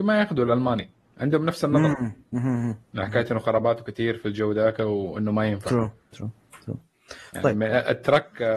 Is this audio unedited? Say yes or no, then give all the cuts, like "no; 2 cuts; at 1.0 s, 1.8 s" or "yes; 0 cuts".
no; 1 cut; at 6.1 s